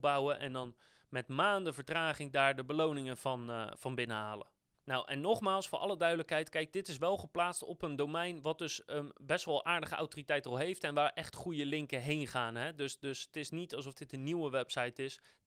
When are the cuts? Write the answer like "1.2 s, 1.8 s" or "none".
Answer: none